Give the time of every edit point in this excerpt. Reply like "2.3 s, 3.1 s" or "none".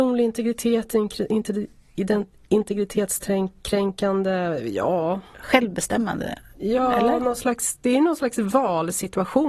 none